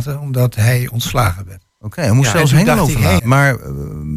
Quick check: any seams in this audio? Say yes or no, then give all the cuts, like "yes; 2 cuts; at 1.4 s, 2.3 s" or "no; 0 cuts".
yes; 2 cuts; at 1.7 s, 3.2 s